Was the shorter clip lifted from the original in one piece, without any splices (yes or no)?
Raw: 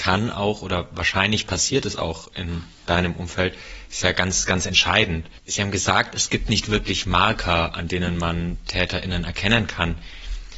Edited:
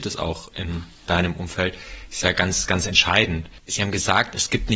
yes